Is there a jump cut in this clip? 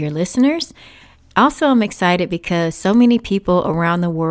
no; 0 cuts

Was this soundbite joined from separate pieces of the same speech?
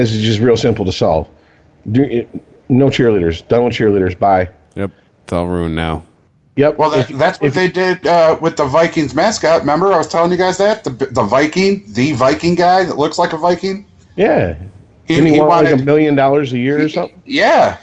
yes; 1 cut; at 5.1 s

